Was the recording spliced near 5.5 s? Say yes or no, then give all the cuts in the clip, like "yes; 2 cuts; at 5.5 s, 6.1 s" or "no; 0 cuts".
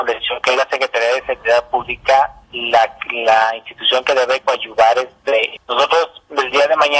yes; 2 cuts; at 2.4 s, 5.5 s